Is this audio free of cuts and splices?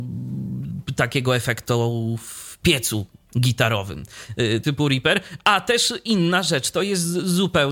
no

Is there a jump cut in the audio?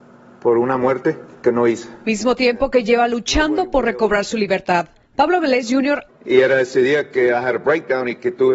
yes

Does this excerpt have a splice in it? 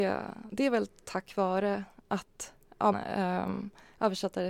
yes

